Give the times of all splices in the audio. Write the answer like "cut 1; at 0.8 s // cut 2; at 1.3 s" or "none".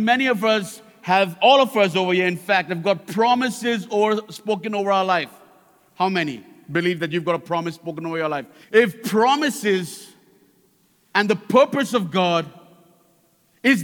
cut 1; at 8.6 s